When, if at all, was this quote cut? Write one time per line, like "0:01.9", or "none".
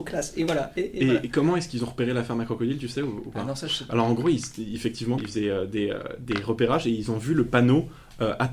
0:05.2